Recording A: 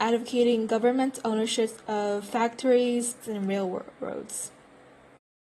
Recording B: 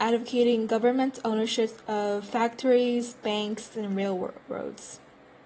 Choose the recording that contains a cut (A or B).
A